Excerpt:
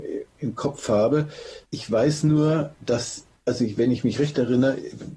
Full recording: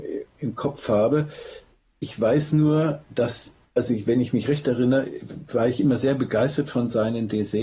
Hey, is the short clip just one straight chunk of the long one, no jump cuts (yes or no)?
no